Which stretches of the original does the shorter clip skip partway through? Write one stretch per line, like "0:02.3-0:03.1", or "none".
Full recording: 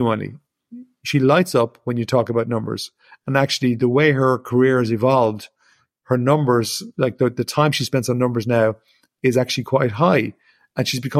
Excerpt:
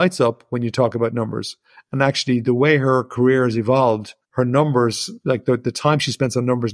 0:05.6-0:05.9